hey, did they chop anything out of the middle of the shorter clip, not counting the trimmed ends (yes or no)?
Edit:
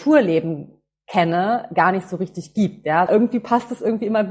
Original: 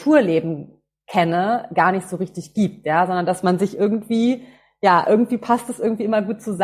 yes